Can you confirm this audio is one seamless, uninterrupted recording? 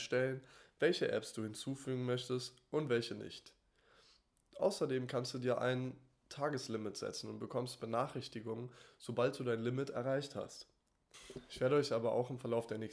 yes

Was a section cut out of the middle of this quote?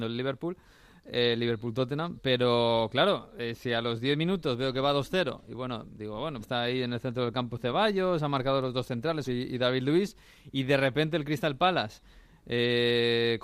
yes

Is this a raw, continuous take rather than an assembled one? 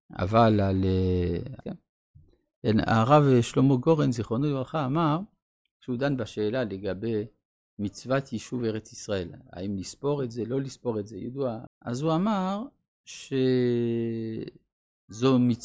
no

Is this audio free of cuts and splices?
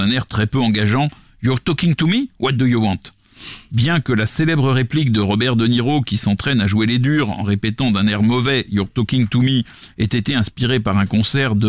yes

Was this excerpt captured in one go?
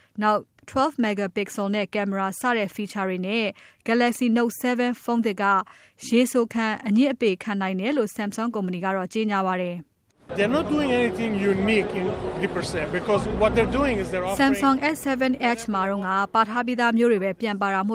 yes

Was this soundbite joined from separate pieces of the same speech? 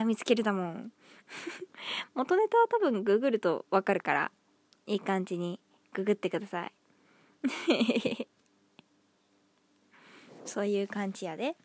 no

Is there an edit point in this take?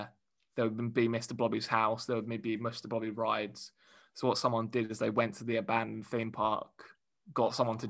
no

